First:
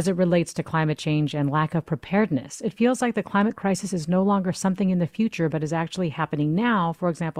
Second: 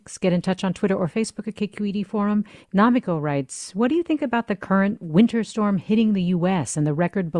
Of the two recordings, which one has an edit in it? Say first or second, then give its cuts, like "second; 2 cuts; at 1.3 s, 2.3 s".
second; 1 cut; at 2.6 s